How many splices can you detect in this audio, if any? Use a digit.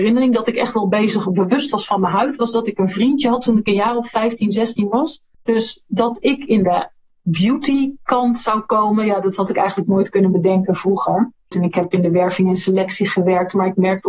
2